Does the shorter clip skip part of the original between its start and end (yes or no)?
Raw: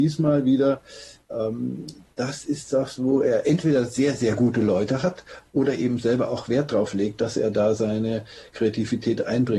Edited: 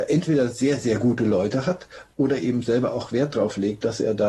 no